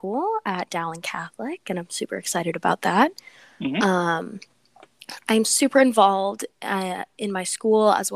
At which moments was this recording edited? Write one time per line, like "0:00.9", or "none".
none

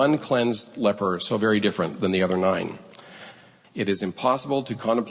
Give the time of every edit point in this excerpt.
0:03.6

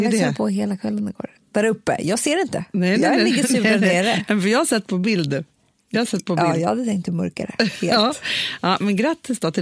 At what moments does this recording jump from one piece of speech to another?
none

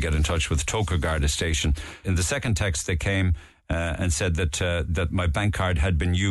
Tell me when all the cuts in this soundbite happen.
0:02.0

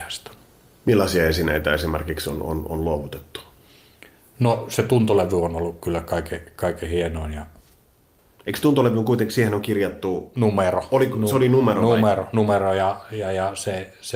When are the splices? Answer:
none

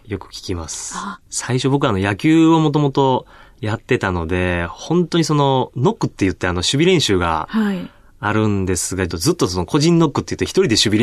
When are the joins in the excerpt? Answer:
0:01.2
0:09.1

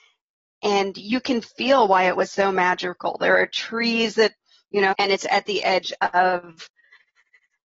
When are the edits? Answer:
0:04.9

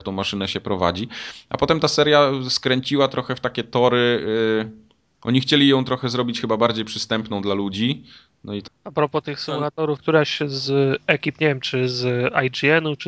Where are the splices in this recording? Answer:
0:08.7
0:10.0

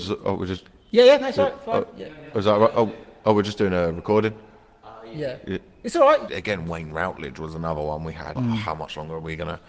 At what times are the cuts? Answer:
0:06.3
0:08.4

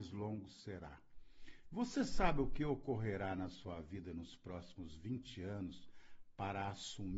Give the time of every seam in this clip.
none

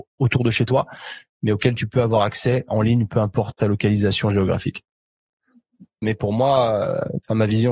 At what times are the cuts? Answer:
0:06.0

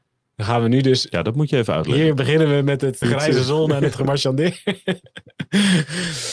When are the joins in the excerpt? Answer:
0:03.0

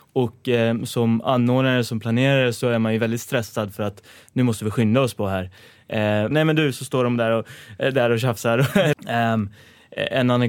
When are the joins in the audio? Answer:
0:06.3
0:08.9

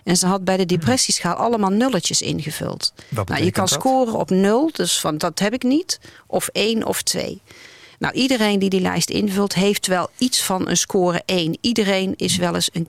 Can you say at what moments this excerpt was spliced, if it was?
none

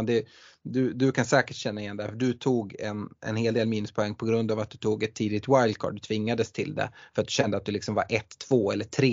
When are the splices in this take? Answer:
none

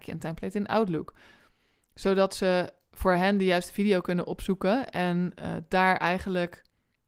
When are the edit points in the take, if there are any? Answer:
none

